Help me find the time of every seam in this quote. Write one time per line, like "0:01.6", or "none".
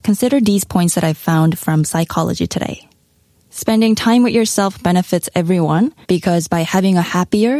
0:03.3
0:06.0